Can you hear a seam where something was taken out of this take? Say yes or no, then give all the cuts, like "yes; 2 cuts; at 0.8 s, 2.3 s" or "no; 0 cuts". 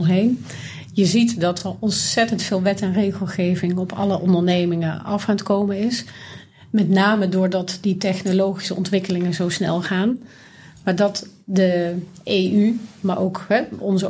no; 0 cuts